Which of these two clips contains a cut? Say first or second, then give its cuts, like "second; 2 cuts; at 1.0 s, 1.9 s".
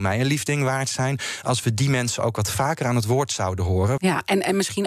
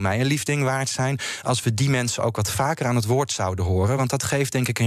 first; 1 cut; at 4.0 s